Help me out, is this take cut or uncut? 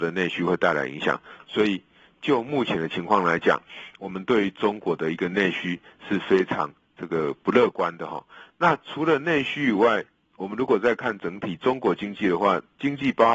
uncut